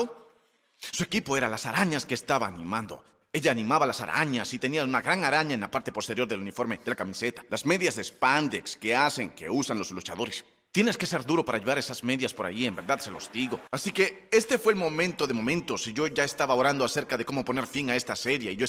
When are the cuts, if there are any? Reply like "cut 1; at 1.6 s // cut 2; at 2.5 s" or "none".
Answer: cut 1; at 13.7 s